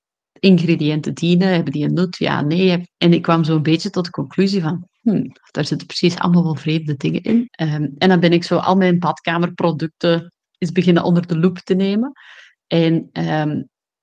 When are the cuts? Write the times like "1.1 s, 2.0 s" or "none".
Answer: 2.9 s, 7.5 s